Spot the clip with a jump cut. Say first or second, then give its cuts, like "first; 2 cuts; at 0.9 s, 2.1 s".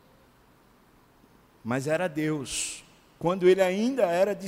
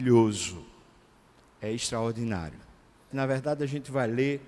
second; 1 cut; at 3.1 s